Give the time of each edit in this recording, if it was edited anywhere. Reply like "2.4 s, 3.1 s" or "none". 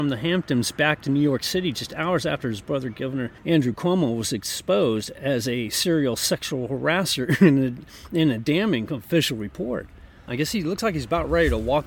10.3 s